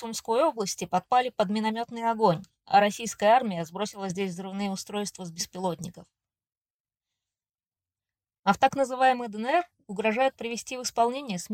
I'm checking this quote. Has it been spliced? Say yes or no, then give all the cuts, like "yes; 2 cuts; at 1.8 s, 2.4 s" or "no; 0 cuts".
no; 0 cuts